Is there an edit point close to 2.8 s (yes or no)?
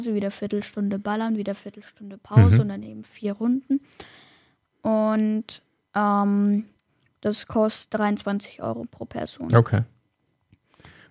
no